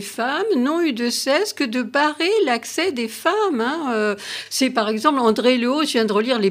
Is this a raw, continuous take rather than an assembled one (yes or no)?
yes